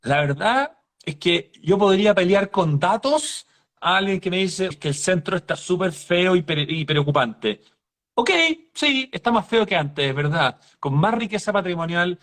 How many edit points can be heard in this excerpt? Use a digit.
2